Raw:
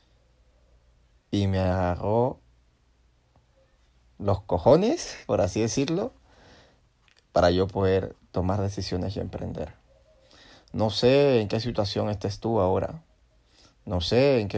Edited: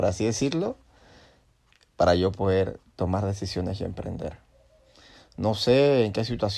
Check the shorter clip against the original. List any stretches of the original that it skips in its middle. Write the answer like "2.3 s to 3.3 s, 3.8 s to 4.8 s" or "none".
none